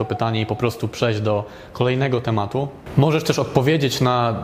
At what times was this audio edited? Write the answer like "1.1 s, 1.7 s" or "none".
none